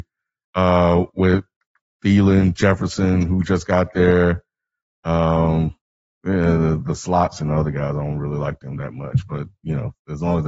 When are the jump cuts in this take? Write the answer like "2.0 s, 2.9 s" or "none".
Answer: none